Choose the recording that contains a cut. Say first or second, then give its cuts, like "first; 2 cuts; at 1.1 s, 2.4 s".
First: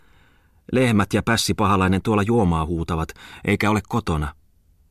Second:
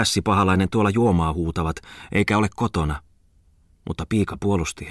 second; 1 cut; at 3.7 s